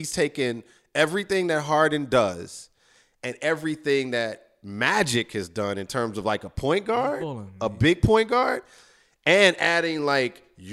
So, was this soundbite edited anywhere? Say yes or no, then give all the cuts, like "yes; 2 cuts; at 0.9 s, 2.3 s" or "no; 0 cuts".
no; 0 cuts